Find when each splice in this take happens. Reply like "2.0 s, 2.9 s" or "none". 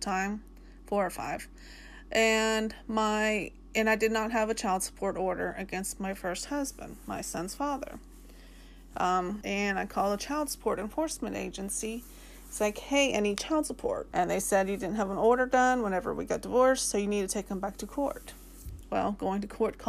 9.4 s, 14.1 s